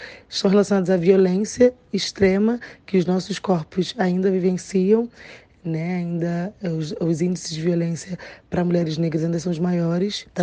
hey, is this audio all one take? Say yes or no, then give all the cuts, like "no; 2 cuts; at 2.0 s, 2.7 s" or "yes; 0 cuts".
yes; 0 cuts